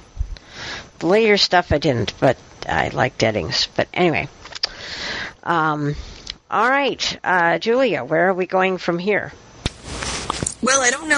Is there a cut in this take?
no; 0 cuts

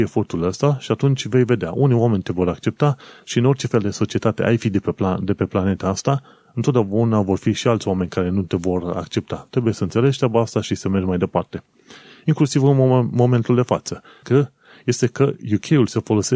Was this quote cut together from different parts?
yes; 1 cut; at 14.2 s

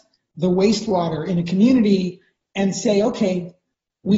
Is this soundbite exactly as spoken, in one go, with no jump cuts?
yes; 0 cuts

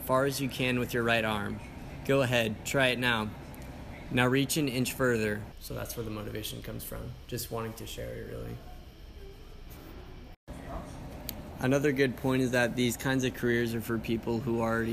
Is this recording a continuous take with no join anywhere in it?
no; 1 cut; at 5.5 s

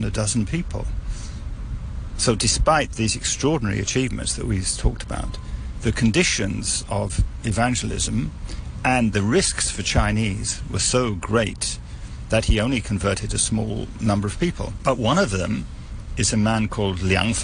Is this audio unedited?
yes; 0 cuts

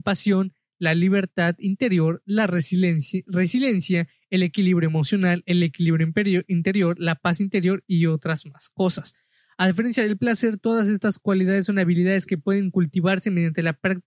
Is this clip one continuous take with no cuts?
yes; 0 cuts

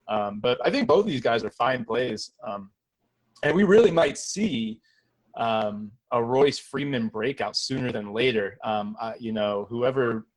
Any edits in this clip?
no; 0 cuts

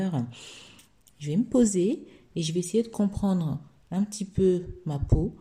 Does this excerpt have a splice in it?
yes; 1 cut; at 1.1 s

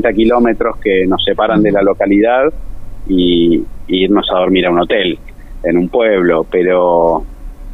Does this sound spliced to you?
no; 0 cuts

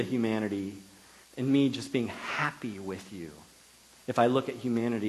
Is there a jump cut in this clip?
yes; 1 cut; at 1.2 s

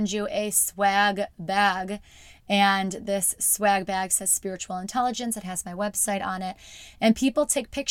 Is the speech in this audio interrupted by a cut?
no; 0 cuts

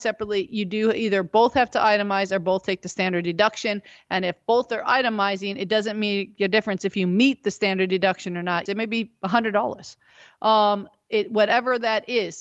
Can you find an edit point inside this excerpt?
yes; 1 cut; at 8.7 s

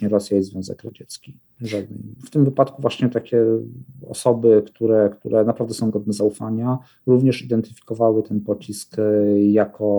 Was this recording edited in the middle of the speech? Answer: yes; 1 cut; at 2.2 s

